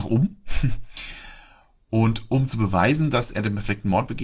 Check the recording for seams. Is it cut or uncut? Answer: uncut